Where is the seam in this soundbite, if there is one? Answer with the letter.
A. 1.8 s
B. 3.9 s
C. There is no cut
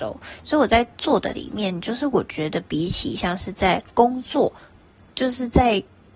B